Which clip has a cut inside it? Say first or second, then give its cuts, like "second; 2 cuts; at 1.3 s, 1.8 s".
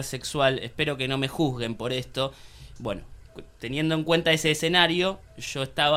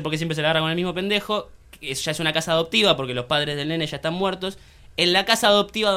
first; 1 cut; at 2.8 s